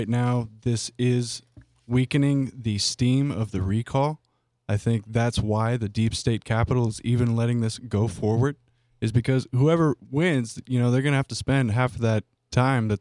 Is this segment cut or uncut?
uncut